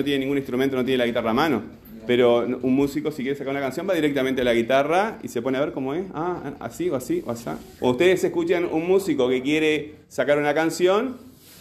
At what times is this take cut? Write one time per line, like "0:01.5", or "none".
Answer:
0:07.8